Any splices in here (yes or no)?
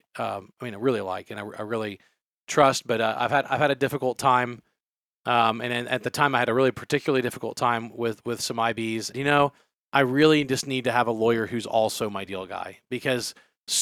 yes